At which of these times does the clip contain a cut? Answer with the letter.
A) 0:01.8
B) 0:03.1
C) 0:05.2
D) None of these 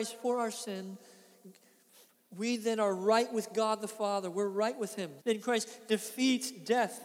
C